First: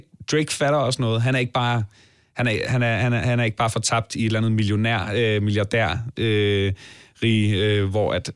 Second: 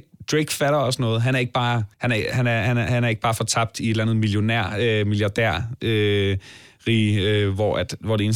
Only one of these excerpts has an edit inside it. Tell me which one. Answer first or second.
second